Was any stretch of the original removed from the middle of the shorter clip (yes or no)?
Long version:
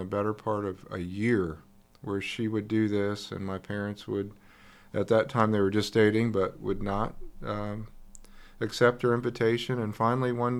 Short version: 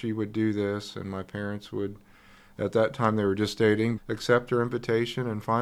yes